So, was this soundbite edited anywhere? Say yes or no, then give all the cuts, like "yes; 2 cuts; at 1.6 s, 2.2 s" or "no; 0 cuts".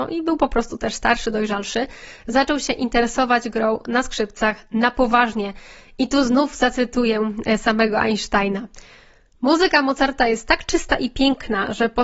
no; 0 cuts